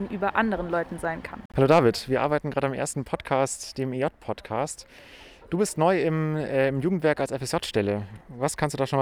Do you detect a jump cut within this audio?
no; 0 cuts

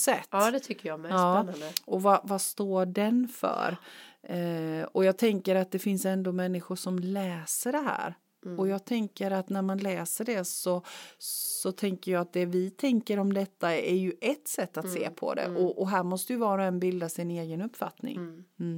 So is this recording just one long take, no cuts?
yes; 0 cuts

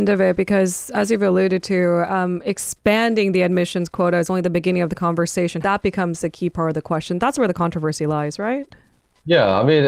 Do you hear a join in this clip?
yes; 1 cut; at 5.6 s

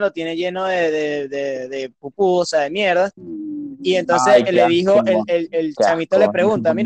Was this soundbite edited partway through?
no; 0 cuts

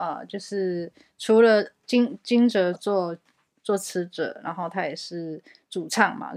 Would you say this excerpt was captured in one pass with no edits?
no; 1 cut; at 2.7 s

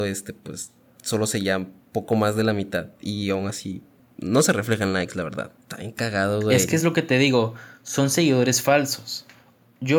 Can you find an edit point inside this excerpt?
no; 0 cuts

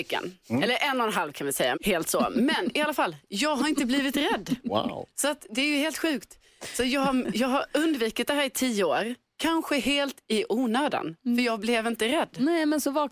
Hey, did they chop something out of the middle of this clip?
yes; 1 cut; at 1.7 s

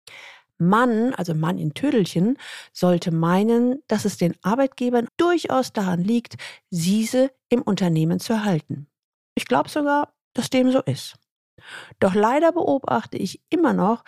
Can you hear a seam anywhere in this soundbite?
yes; 1 cut; at 5.1 s

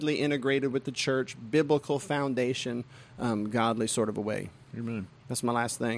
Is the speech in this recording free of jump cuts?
yes; 0 cuts

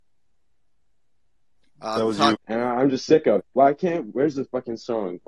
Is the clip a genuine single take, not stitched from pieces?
no; 2 cuts; at 2.3 s, 3.4 s

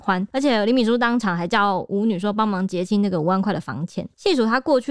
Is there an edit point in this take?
no; 0 cuts

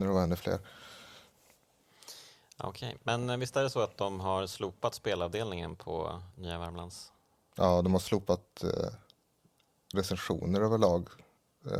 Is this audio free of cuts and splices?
yes; 0 cuts

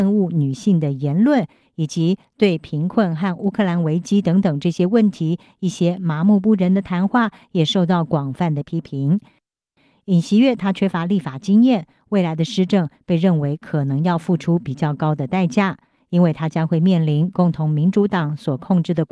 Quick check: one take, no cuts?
yes; 0 cuts

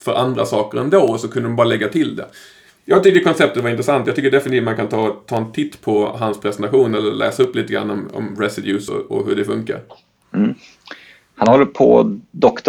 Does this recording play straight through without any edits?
yes; 0 cuts

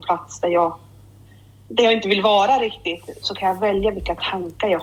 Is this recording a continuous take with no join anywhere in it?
no; 1 cut; at 3.2 s

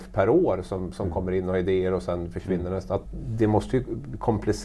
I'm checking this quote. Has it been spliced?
yes; 1 cut; at 3.0 s

